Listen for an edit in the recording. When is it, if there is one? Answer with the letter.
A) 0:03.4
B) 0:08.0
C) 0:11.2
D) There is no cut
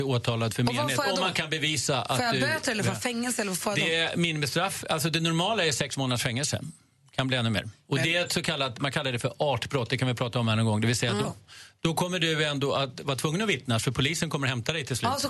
C